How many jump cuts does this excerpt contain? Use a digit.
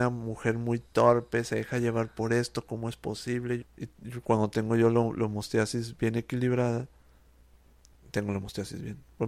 1